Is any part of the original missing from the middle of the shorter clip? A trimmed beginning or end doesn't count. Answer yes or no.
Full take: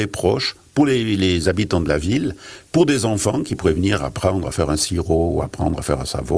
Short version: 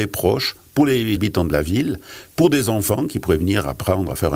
yes